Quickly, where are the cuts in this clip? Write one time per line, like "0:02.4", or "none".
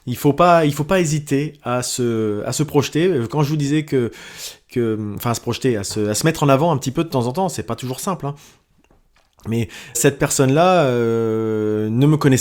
0:09.9